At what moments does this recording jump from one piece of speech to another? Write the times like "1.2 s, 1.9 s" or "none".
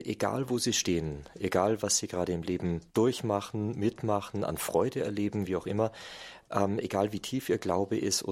2.9 s